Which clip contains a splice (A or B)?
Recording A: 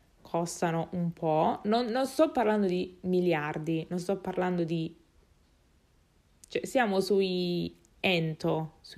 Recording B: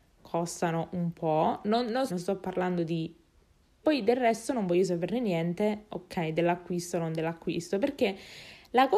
B